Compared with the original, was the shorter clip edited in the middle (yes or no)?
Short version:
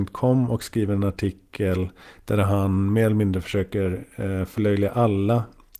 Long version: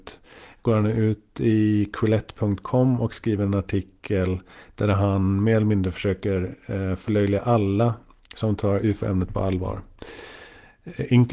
no